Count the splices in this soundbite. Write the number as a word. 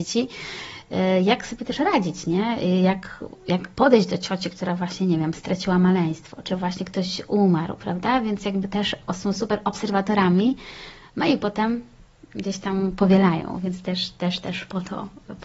one